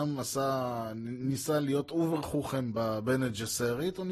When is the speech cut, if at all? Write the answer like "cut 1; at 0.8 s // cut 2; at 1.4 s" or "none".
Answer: none